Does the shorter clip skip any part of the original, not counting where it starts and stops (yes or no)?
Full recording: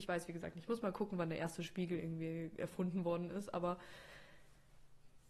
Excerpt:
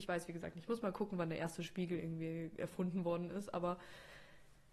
no